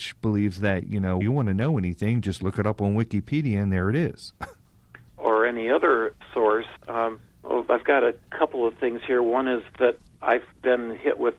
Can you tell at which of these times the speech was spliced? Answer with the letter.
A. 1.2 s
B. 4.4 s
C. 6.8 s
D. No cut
A